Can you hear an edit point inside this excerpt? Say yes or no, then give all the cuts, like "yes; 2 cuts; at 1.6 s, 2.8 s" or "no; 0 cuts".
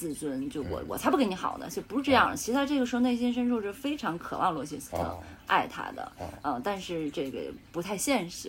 no; 0 cuts